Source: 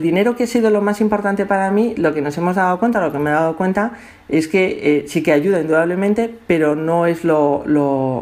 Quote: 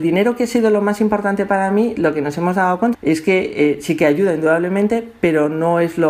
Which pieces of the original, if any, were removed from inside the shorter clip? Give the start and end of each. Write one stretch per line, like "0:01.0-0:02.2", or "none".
0:02.9-0:04.2